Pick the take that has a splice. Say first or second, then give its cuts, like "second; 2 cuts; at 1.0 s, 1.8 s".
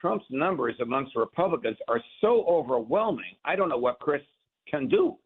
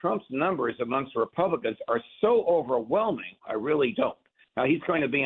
second; 1 cut; at 3.4 s